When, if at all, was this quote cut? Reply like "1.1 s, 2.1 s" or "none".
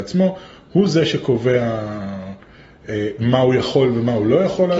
none